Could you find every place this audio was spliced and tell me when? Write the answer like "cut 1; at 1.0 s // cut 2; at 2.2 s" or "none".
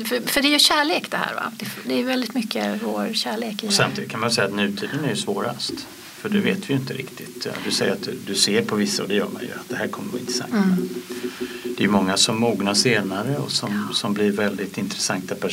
none